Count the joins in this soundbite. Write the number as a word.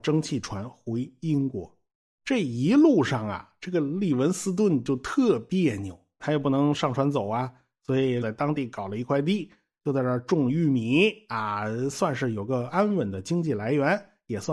three